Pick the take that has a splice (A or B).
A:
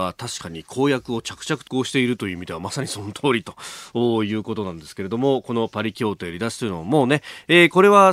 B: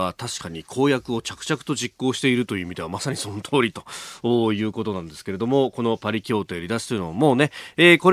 A